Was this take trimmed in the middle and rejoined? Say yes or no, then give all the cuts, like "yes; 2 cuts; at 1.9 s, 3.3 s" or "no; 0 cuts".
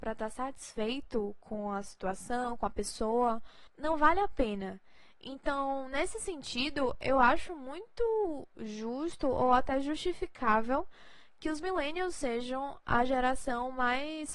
no; 0 cuts